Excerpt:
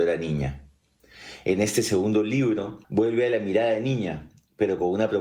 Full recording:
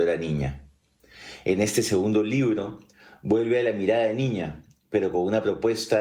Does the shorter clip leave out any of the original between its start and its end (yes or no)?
yes